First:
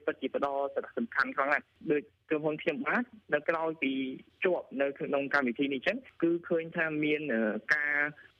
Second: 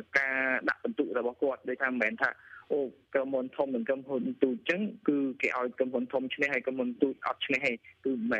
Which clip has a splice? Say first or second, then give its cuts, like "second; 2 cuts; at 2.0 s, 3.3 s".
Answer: first; 1 cut; at 3.4 s